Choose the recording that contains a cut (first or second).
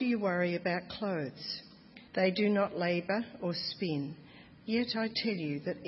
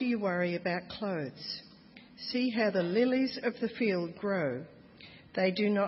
first